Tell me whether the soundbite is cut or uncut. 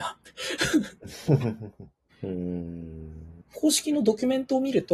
cut